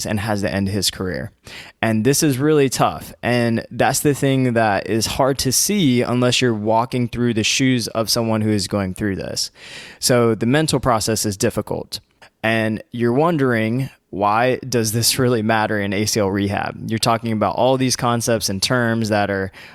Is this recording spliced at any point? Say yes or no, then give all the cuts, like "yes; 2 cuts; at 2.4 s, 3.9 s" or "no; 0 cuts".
yes; 1 cut; at 12.2 s